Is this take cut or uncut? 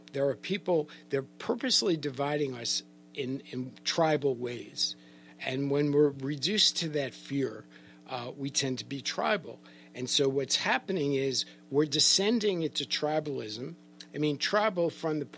cut